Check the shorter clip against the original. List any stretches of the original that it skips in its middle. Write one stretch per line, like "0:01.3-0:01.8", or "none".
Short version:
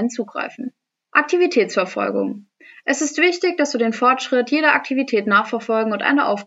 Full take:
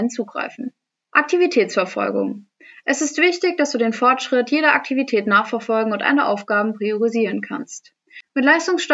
none